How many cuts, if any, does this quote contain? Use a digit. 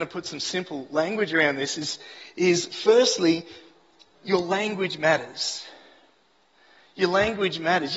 0